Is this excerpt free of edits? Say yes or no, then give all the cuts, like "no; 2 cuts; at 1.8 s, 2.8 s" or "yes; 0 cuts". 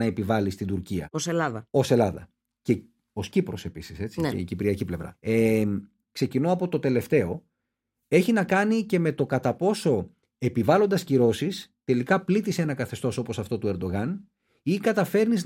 no; 1 cut; at 6.0 s